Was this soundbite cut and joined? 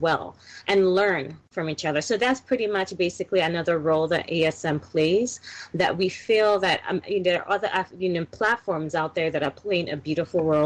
yes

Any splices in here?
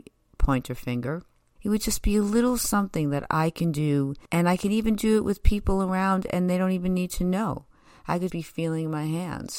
yes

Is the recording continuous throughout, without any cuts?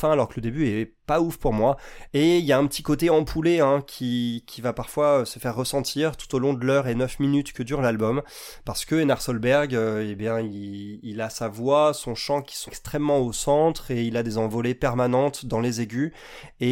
no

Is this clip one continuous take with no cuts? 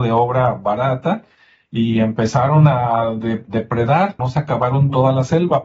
no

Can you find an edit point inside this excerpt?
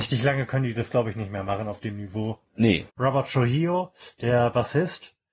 yes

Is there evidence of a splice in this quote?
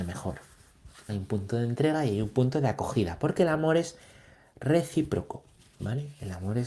yes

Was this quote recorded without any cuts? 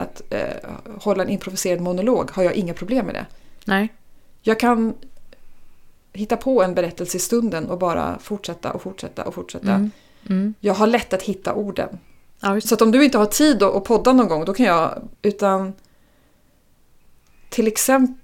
no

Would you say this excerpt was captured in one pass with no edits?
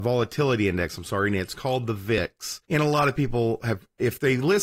no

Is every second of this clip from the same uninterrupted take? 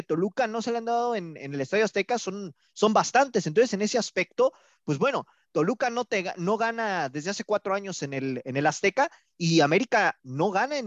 yes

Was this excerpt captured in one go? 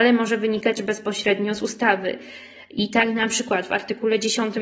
yes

